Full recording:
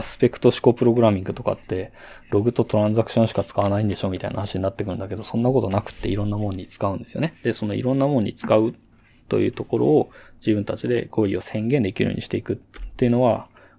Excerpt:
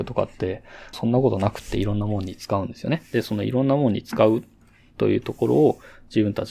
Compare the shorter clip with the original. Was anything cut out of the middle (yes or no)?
yes